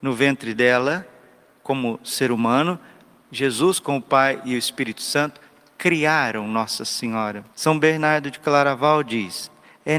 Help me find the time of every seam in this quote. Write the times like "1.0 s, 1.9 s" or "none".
7.5 s